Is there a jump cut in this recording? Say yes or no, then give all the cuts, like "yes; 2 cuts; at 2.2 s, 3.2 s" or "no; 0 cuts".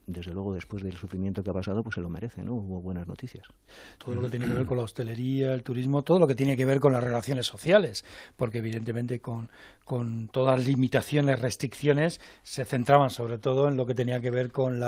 yes; 1 cut; at 4.0 s